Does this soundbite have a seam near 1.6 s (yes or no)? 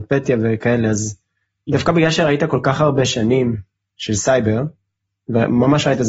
no